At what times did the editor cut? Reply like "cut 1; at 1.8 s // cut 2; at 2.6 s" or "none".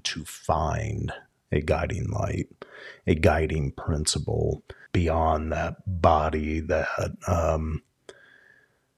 cut 1; at 4.9 s